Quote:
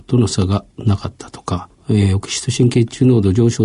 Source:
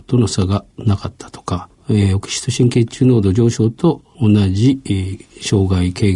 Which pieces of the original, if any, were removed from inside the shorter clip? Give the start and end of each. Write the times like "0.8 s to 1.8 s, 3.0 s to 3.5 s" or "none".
none